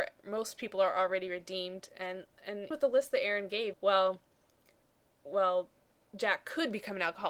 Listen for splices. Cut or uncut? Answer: cut